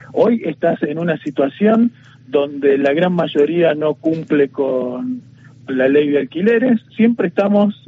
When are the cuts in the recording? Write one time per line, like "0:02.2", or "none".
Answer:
0:06.9